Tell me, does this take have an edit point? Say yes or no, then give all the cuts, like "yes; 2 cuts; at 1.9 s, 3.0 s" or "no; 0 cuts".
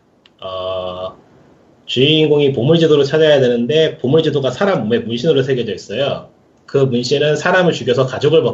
yes; 1 cut; at 6.6 s